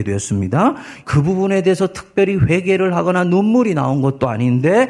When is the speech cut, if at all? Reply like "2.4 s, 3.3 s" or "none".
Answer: 1.0 s